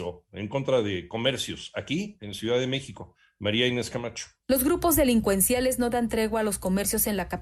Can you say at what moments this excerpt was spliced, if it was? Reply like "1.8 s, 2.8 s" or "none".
none